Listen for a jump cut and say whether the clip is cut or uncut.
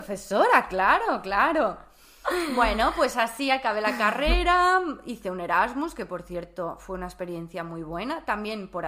uncut